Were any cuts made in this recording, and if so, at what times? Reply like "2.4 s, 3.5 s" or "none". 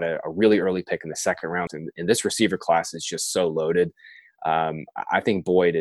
1.7 s

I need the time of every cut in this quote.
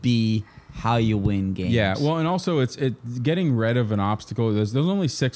none

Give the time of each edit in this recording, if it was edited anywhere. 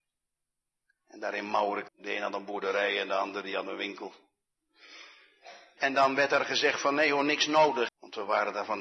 1.9 s, 5.8 s, 7.9 s

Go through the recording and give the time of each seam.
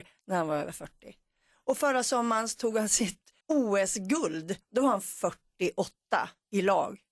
3.4 s

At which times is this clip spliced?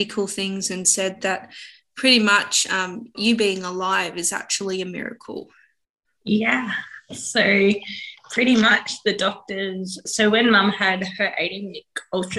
3.1 s

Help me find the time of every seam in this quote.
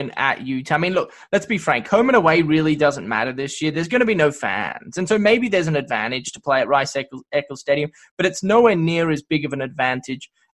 none

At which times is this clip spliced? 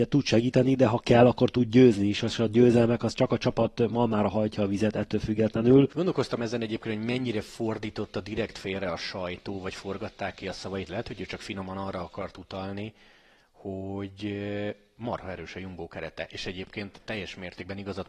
5.9 s

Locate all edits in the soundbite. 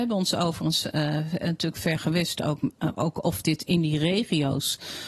none

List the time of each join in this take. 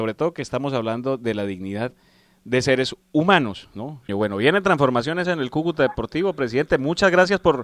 4.1 s, 5.2 s

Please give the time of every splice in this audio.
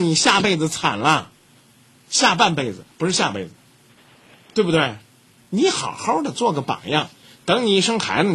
none

